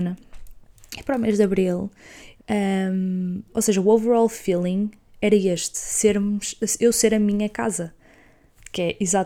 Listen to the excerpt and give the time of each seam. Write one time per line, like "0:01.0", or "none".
0:02.4
0:03.5

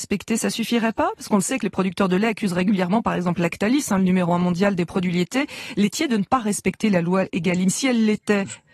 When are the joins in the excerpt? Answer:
none

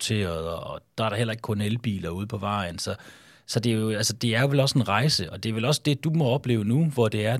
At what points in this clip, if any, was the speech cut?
none

